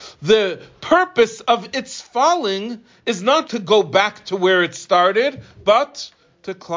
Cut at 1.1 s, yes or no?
no